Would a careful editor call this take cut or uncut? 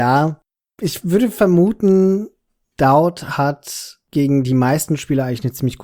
uncut